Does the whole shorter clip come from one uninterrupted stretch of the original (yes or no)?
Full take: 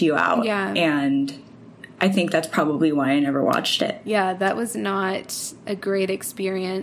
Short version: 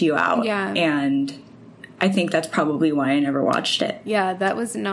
yes